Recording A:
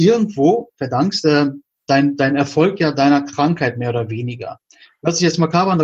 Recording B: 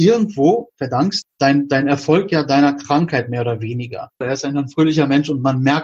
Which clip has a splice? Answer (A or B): B